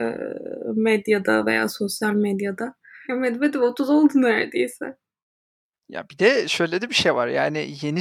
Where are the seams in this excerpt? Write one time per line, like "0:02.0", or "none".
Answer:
0:03.0